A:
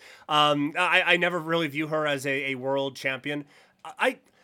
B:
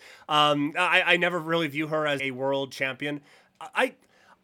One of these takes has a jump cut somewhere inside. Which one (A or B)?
B